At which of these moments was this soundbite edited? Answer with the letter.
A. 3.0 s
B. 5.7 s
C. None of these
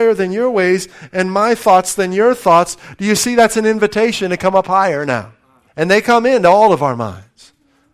B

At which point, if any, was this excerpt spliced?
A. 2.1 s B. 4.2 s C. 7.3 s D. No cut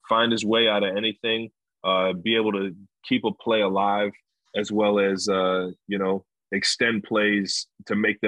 D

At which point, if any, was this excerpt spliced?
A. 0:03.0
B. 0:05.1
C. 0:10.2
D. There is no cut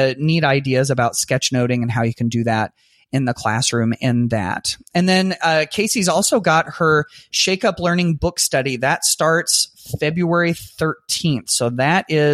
D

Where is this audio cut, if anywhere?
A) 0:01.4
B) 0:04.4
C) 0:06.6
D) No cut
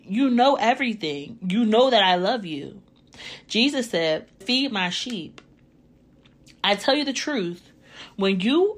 B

